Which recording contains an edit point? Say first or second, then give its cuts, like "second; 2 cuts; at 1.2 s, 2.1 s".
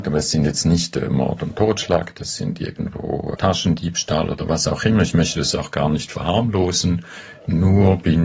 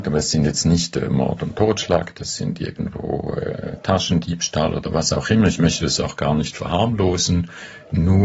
first; 1 cut; at 3.4 s